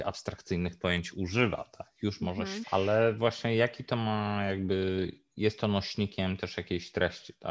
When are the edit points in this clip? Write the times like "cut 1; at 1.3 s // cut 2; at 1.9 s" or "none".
cut 1; at 2.6 s